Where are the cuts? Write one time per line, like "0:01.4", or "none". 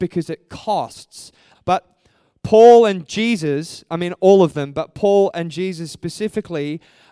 0:01.5